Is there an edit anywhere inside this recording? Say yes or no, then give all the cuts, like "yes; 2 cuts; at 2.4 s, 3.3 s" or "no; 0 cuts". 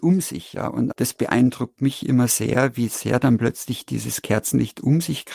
yes; 1 cut; at 0.9 s